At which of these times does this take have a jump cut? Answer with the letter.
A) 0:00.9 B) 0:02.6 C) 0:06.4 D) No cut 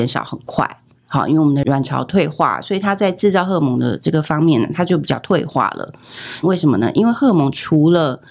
C